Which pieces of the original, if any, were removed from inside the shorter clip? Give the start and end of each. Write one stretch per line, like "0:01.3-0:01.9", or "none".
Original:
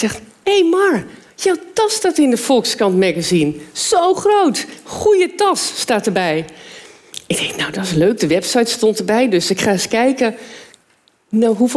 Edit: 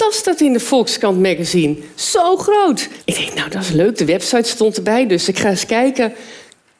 0:04.8-0:07.2